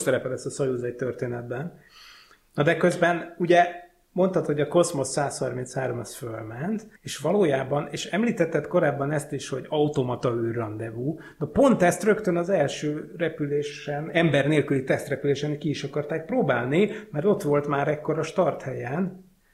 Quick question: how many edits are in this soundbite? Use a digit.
1